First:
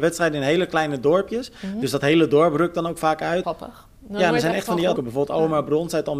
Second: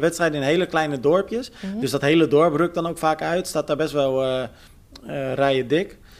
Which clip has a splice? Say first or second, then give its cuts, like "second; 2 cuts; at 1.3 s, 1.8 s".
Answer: first; 2 cuts; at 3.4 s, 5.0 s